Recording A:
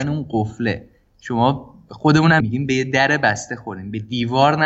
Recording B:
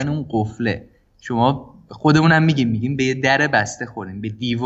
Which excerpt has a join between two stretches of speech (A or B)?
A